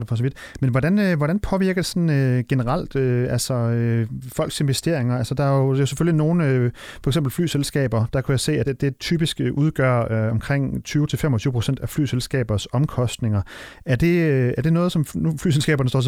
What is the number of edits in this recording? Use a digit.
0